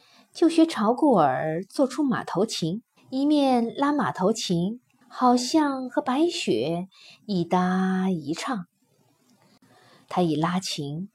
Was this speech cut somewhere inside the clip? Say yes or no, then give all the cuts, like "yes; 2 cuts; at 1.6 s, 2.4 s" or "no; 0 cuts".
yes; 3 cuts; at 3.0 s, 5.0 s, 10.0 s